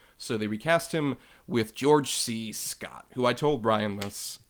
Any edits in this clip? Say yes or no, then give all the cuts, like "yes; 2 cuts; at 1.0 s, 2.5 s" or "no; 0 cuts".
no; 0 cuts